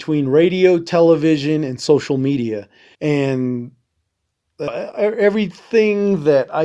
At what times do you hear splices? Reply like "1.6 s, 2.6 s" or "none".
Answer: 2.9 s, 4.7 s